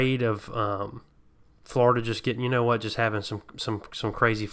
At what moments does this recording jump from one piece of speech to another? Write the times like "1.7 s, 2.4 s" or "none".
none